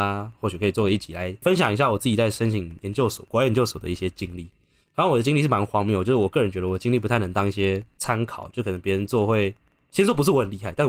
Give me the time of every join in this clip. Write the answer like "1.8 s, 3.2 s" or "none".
none